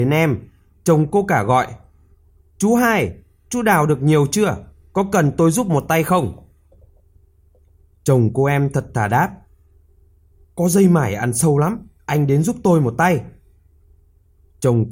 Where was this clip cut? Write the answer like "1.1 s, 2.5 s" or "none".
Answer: none